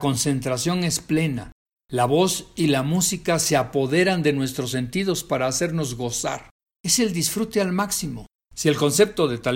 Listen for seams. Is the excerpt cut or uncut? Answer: cut